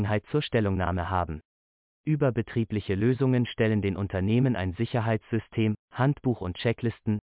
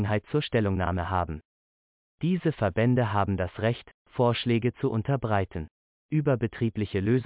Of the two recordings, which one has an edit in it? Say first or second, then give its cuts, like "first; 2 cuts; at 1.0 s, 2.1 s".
first; 1 cut; at 1.9 s